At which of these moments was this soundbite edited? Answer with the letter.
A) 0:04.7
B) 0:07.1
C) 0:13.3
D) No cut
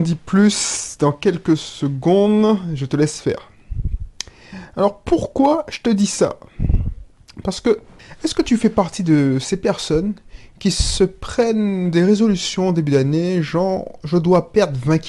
D